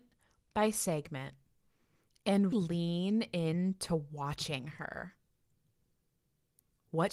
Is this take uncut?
no; 1 cut; at 2.5 s

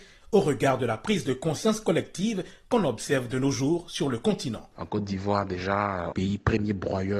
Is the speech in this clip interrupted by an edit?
yes; 1 cut; at 6.1 s

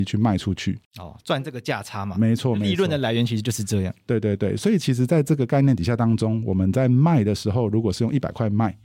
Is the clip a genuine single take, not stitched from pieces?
yes; 0 cuts

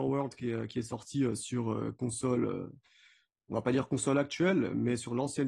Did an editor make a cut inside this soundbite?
no; 0 cuts

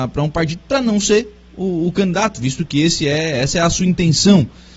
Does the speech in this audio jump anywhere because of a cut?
no; 0 cuts

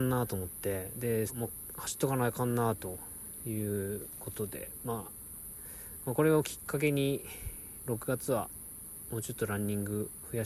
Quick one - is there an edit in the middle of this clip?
yes; 1 cut; at 1.3 s

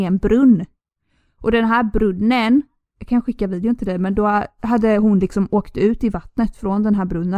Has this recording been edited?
yes; 1 cut; at 2.9 s

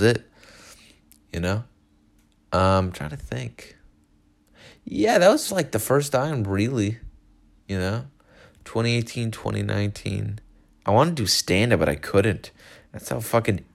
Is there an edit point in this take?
no; 0 cuts

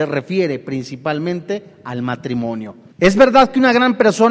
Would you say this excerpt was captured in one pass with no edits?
no; 1 cut; at 2.9 s

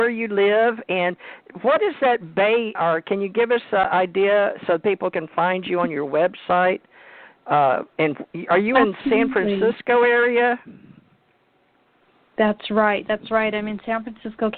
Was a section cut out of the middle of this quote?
yes; 1 cut; at 2.8 s

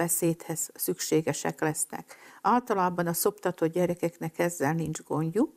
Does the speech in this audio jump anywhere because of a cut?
no; 0 cuts

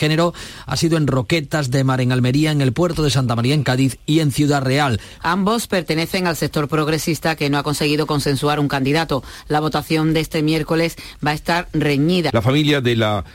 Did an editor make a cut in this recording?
yes; 2 cuts; at 5.2 s, 12.3 s

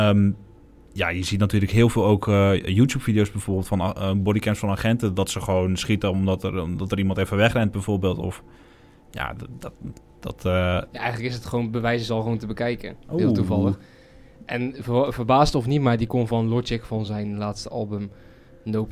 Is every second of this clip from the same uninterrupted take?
no; 1 cut; at 13.0 s

